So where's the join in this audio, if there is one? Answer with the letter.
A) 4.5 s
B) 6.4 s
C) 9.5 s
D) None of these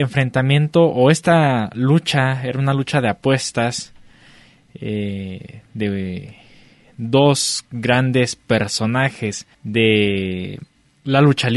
C